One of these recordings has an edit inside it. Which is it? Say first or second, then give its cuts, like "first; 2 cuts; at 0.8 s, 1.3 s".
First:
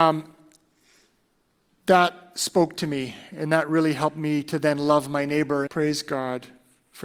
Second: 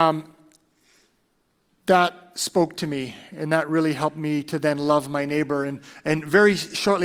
first; 1 cut; at 5.7 s